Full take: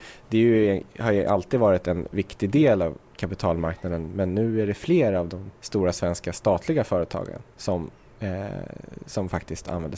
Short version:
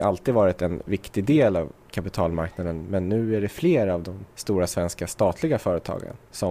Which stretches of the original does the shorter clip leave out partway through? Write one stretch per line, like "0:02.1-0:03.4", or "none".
none